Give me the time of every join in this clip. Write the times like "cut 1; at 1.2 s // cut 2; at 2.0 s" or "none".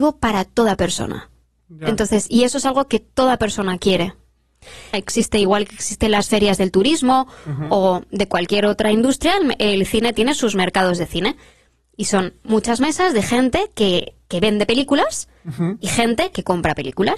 cut 1; at 4.9 s